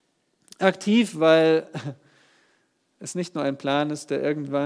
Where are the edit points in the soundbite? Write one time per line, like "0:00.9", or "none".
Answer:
none